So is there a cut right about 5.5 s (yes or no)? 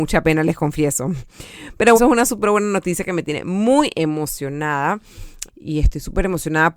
yes